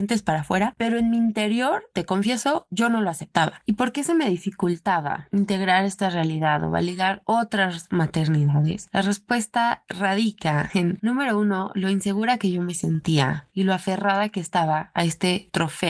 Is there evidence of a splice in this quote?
no; 0 cuts

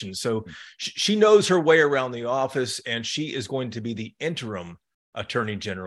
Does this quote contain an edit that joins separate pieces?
no; 0 cuts

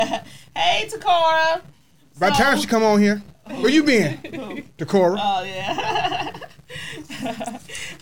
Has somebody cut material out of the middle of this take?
no; 0 cuts

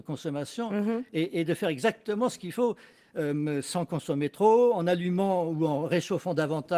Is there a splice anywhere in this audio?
no; 0 cuts

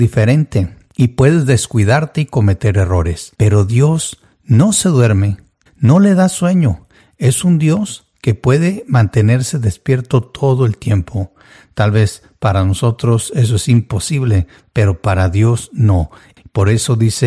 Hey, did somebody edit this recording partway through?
yes; 2 cuts; at 3.3 s, 5.7 s

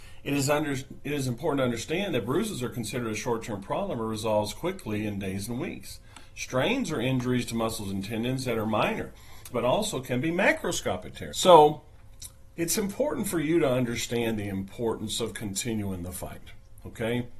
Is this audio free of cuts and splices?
no; 2 cuts; at 9.5 s, 11.3 s

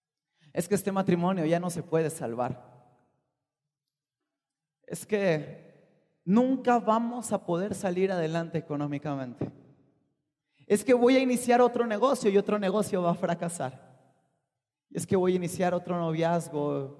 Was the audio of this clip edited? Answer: no; 0 cuts

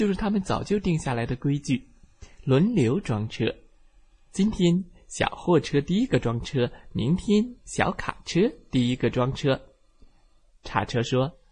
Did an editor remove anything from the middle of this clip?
no; 0 cuts

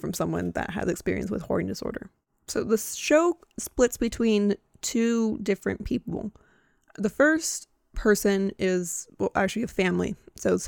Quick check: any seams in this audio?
no; 0 cuts

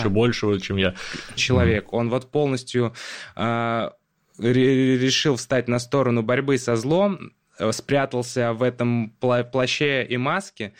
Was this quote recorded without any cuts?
no; 1 cut; at 1.4 s

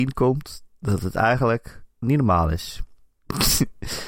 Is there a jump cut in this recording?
yes; 1 cut; at 2.0 s

